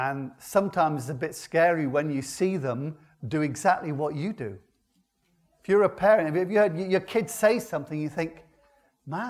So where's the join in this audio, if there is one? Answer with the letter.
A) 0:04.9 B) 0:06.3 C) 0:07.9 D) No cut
D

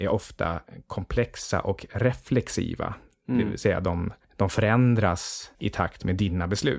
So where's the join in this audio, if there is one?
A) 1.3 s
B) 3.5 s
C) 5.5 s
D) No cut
C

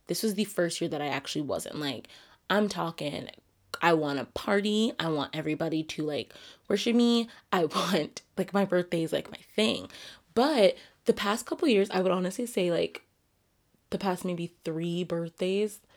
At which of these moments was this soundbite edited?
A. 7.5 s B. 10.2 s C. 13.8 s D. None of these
D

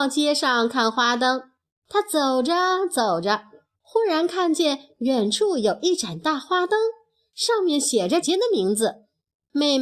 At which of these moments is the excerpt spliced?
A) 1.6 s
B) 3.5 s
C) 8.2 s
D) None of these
C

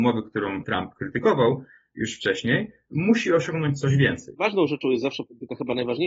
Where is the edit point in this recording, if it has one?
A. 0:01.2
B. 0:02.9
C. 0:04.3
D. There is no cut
C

